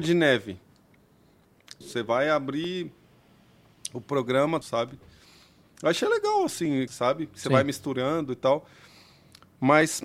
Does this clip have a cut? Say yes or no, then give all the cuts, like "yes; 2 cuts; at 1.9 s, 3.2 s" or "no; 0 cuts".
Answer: yes; 3 cuts; at 1.8 s, 4.6 s, 6.9 s